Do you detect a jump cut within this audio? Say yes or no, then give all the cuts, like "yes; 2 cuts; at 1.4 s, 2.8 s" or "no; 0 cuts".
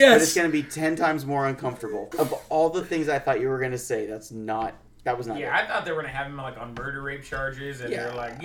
yes; 1 cut; at 2.1 s